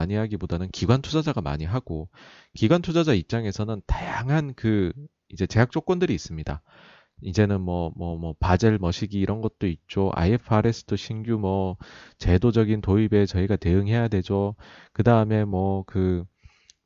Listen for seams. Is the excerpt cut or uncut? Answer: uncut